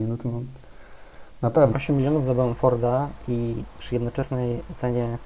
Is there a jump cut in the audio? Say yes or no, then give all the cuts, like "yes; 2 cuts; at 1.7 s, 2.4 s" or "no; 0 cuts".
yes; 1 cut; at 1.7 s